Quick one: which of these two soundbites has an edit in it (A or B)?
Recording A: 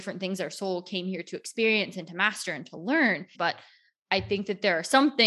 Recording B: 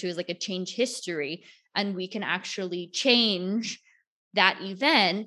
A